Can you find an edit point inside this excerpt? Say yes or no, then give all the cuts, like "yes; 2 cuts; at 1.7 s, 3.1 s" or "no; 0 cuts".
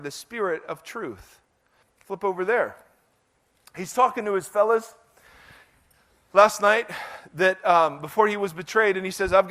yes; 1 cut; at 1.8 s